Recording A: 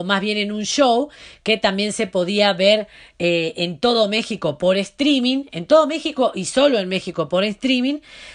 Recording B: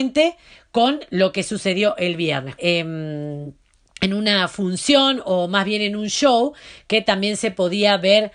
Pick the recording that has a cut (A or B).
B